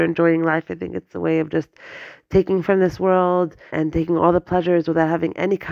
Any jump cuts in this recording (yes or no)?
yes